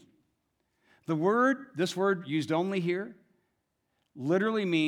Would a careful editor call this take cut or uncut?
uncut